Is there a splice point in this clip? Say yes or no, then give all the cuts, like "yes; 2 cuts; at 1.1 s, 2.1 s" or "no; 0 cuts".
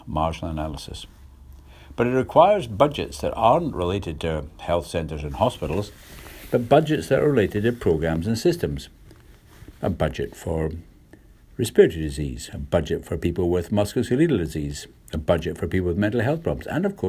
no; 0 cuts